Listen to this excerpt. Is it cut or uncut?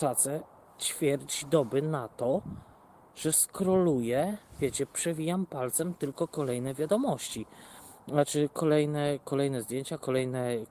uncut